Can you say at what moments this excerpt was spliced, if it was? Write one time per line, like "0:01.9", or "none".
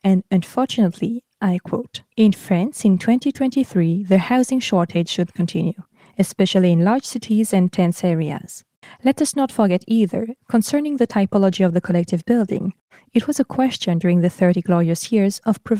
0:02.1
0:08.8